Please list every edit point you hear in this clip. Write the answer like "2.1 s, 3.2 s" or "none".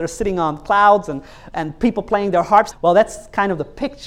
2.7 s